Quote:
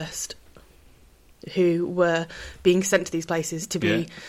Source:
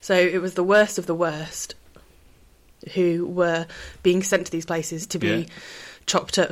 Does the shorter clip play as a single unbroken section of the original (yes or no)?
yes